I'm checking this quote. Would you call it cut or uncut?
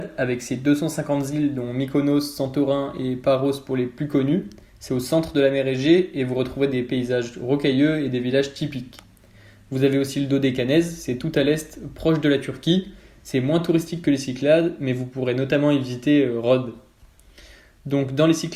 uncut